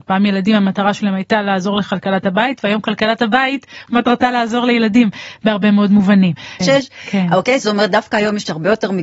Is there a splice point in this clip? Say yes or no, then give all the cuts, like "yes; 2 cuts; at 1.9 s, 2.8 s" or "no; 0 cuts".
yes; 1 cut; at 6.6 s